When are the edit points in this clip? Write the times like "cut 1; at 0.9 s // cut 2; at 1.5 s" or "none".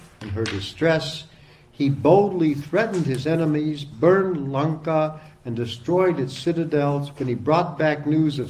none